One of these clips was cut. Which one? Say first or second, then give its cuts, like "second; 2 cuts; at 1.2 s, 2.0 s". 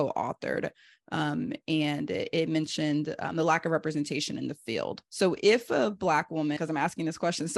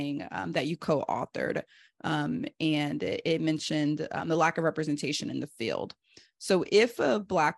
first; 2 cuts; at 5.0 s, 6.6 s